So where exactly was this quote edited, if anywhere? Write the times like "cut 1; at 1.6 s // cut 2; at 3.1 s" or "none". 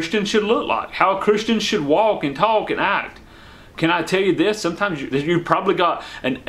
cut 1; at 5.1 s